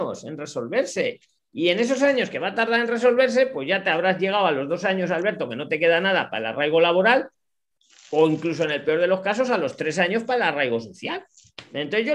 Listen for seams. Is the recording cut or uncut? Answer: uncut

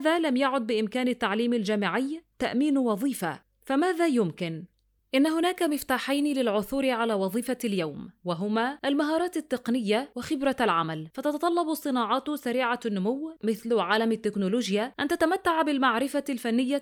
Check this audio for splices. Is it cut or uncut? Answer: uncut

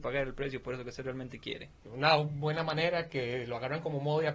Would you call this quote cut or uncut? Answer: cut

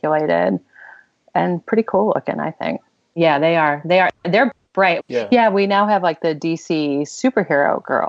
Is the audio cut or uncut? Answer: cut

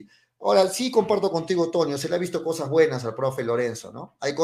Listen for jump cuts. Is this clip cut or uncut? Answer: uncut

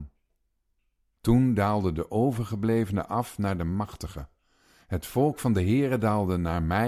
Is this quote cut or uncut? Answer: uncut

